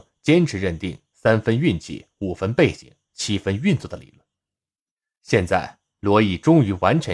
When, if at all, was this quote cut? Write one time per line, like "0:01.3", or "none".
none